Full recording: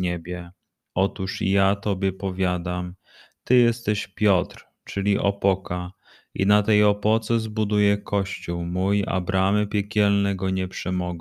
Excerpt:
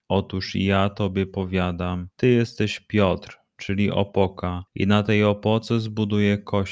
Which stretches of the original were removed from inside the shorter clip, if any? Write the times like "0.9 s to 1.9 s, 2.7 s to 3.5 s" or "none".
3.0 s to 3.4 s, 5.9 s to 6.3 s